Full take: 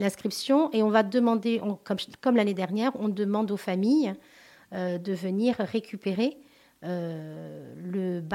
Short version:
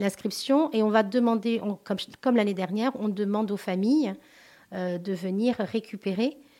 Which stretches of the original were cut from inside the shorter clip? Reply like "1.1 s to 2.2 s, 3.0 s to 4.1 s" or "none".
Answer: none

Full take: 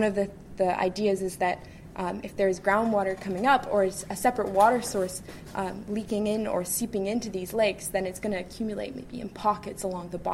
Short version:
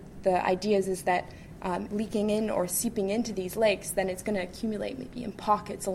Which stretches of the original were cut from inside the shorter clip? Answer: 2.2 s to 5.8 s

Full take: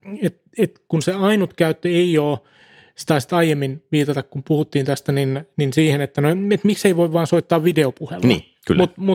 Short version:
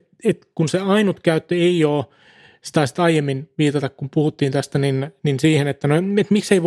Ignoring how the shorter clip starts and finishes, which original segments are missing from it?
none

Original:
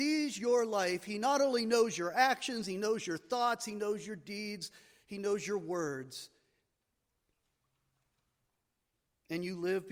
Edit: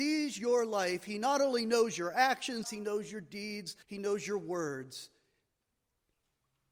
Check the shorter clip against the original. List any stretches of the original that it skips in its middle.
2.6 s to 3.6 s, 4.8 s to 5.0 s

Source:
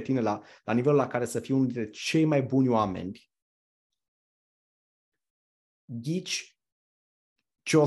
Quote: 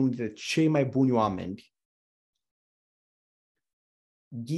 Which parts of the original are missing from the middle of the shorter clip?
none

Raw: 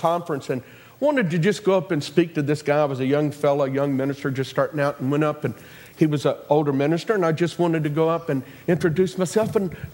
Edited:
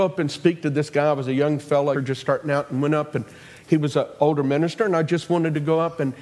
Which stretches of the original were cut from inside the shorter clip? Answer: 3.7 s to 4.2 s

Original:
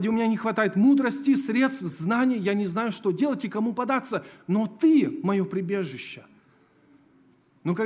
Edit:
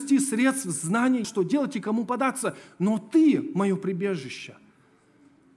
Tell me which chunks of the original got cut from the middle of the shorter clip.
2.4 s to 2.9 s

